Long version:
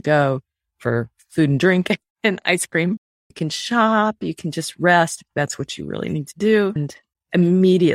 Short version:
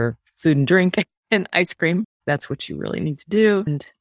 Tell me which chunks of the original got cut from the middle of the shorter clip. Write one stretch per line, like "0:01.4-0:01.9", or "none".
0:03.1-0:05.3